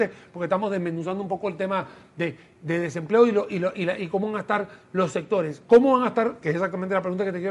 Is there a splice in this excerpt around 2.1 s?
no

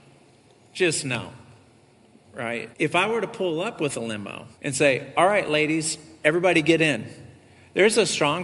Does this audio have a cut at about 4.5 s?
yes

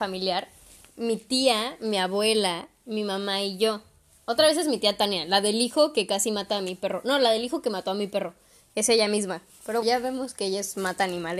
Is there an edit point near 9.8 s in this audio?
yes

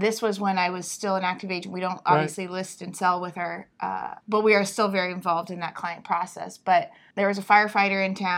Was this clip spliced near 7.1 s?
yes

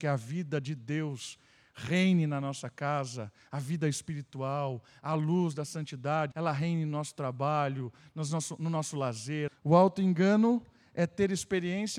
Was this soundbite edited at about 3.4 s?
no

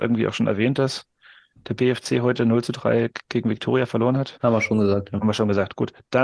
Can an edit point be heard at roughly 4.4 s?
yes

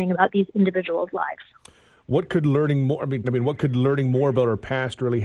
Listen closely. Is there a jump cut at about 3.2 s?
yes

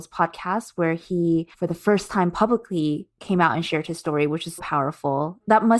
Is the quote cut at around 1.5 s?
yes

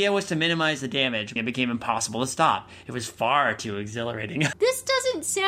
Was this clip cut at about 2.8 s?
no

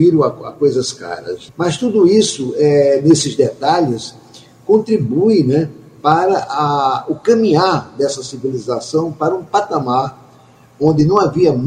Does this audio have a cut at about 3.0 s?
no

